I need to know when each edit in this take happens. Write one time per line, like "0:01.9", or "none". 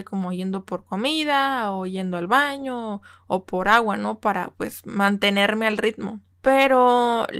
none